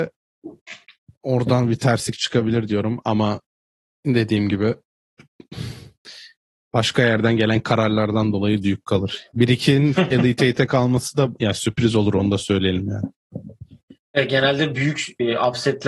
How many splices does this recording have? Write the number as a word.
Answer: zero